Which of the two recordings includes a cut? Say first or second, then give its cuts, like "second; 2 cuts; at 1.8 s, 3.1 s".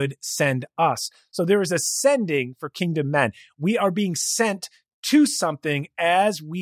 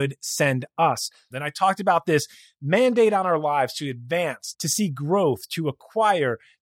second; 2 cuts; at 1.3 s, 4.5 s